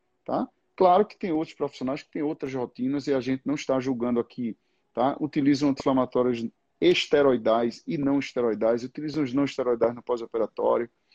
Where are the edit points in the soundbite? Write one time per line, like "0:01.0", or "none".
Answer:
none